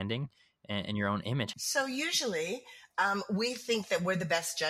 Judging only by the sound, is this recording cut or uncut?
cut